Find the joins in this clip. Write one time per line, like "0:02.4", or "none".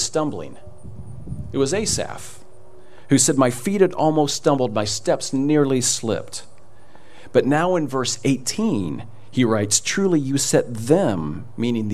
none